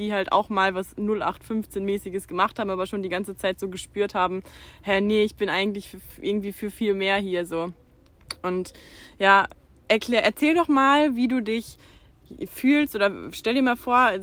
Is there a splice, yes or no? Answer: no